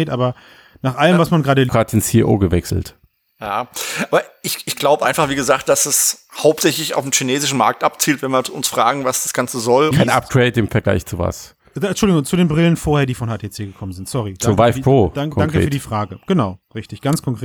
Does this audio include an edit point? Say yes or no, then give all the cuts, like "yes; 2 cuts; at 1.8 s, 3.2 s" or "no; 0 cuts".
yes; 2 cuts; at 1.7 s, 9.9 s